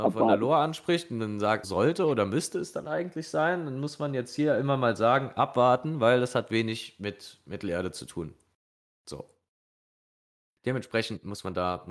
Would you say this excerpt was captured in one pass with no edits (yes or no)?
no